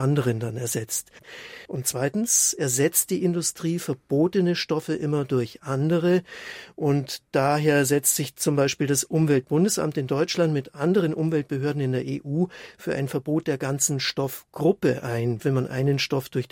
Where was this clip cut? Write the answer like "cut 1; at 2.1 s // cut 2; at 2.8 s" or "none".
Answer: cut 1; at 1.7 s // cut 2; at 15.4 s